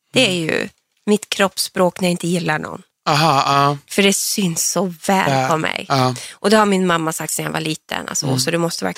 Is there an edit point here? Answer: no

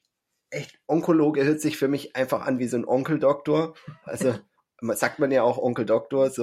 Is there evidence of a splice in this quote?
no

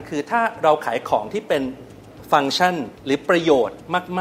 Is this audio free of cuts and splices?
no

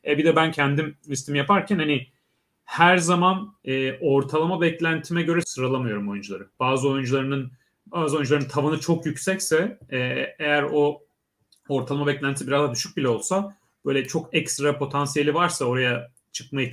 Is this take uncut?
no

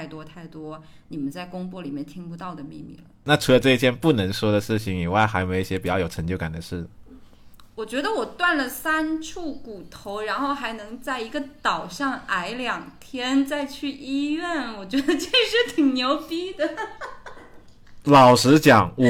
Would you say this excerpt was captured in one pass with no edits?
yes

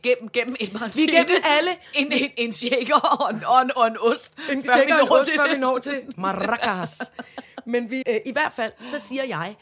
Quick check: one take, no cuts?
no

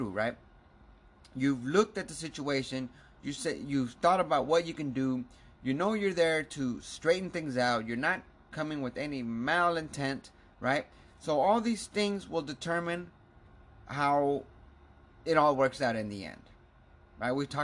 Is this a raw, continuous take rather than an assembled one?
yes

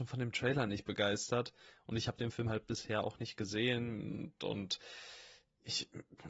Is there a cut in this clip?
no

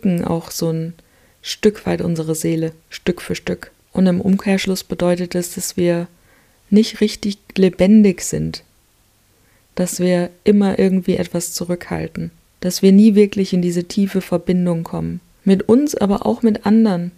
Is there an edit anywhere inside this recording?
no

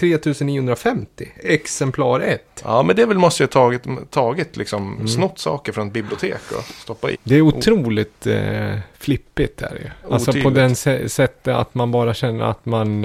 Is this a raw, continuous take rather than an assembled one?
no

